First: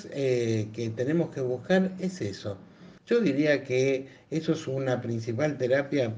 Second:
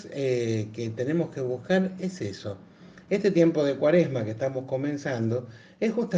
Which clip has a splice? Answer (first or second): first